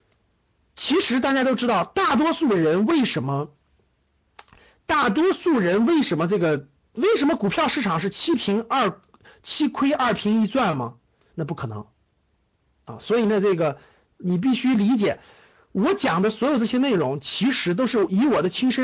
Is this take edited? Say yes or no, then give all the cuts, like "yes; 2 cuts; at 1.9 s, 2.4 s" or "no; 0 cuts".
yes; 1 cut; at 11.3 s